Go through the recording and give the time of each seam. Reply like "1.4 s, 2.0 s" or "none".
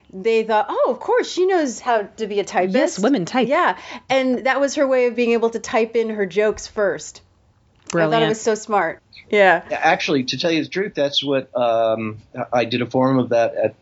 9.0 s